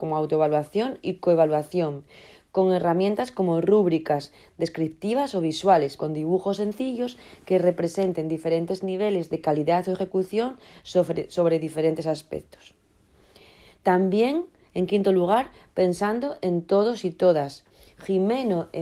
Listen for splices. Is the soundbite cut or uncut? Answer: cut